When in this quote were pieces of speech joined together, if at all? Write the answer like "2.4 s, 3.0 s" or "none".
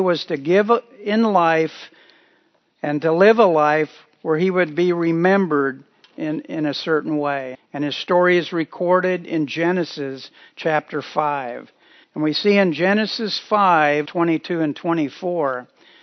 7.5 s, 12.0 s, 14.1 s

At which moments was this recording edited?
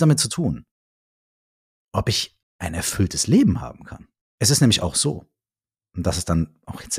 4.2 s

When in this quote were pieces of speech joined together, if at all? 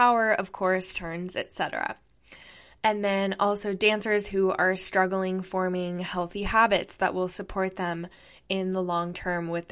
0.9 s

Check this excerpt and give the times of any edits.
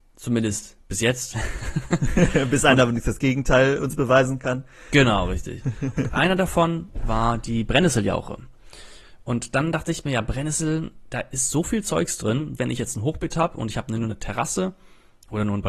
12.6 s

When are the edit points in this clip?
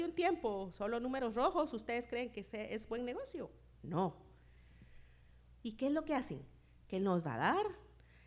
5.6 s, 6.9 s

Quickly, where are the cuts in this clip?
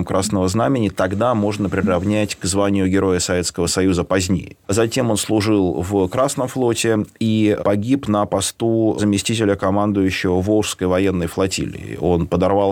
4.6 s

